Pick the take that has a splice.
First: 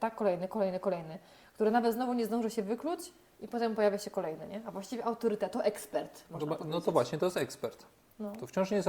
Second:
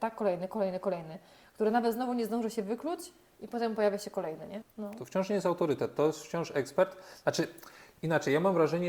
second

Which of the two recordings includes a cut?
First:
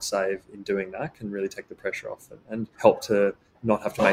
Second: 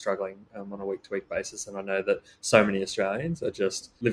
first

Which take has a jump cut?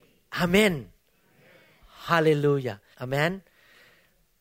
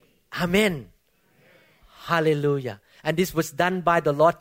first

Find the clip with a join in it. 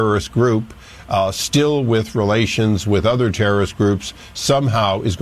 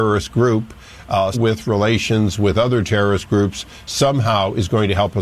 second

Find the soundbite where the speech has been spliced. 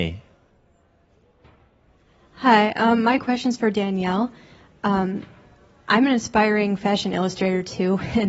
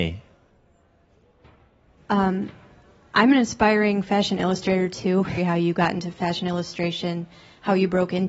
second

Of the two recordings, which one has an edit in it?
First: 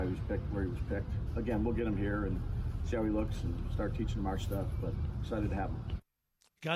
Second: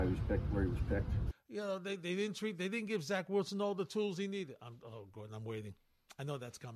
second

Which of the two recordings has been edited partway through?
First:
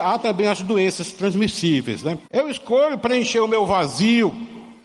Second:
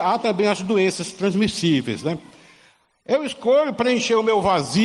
first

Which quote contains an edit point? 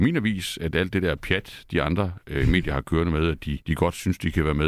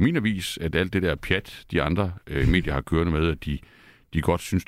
first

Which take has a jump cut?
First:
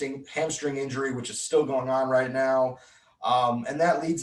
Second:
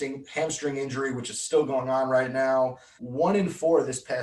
second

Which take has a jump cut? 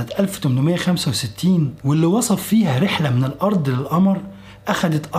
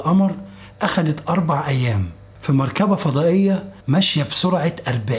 second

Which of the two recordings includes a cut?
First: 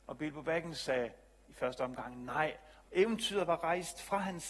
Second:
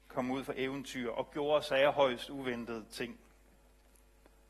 first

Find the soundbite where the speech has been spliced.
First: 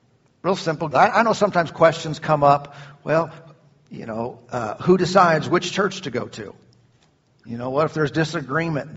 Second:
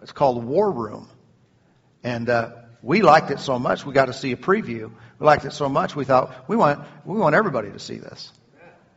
first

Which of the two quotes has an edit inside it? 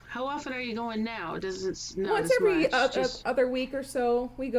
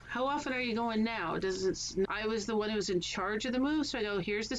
second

